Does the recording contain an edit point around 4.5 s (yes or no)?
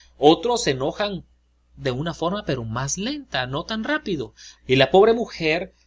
yes